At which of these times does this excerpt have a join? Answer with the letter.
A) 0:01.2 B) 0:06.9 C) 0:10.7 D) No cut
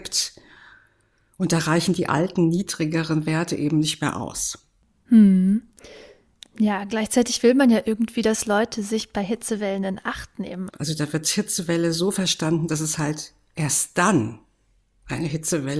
C